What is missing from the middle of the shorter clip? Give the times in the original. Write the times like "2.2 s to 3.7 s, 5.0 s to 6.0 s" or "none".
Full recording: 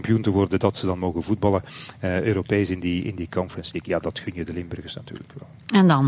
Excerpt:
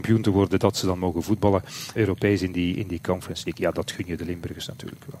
2.0 s to 2.2 s